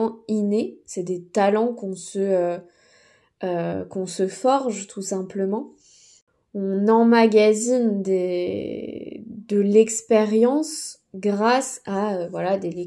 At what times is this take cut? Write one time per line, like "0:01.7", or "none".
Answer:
none

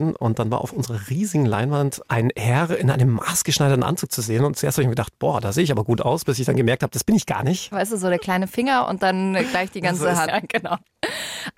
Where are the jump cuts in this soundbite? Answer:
0:07.7
0:10.3

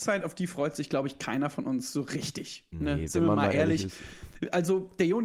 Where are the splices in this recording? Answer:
none

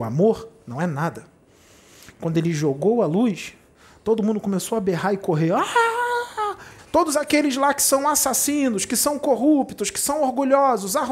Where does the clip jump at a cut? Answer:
0:06.8

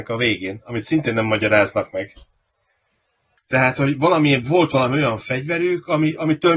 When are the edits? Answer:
0:03.4

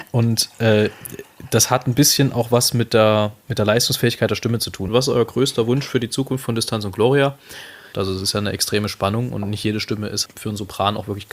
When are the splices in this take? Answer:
0:04.9
0:07.9
0:10.3

